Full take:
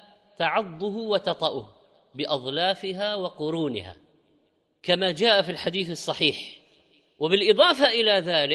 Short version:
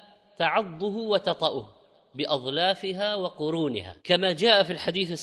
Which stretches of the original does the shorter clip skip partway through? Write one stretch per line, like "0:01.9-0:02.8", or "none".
0:04.0-0:04.8